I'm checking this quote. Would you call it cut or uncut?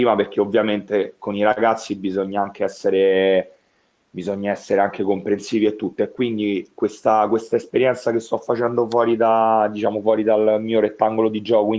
uncut